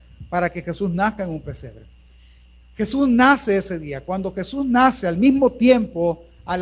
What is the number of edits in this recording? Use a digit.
0